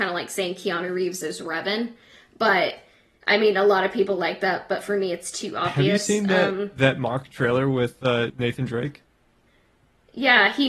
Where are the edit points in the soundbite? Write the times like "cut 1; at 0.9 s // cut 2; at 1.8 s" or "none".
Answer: cut 1; at 8.3 s